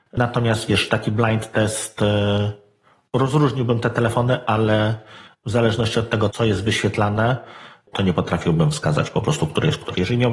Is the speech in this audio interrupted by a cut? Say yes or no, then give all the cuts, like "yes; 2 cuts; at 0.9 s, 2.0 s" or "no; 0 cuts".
yes; 2 cuts; at 6.3 s, 7.9 s